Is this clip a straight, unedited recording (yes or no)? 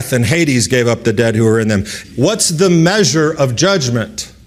no